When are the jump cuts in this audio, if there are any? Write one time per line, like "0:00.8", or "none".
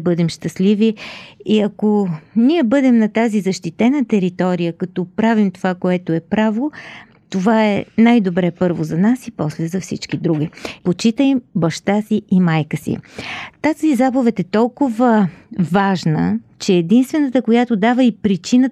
0:10.8